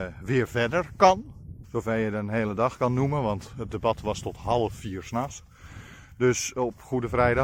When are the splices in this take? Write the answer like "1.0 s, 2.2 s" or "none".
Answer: 1.6 s